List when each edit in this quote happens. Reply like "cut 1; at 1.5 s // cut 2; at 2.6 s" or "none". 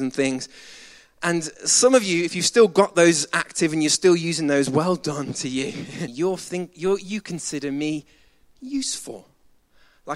cut 1; at 6.1 s